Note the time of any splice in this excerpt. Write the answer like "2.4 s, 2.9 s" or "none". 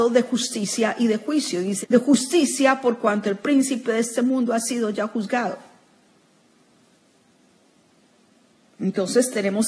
1.8 s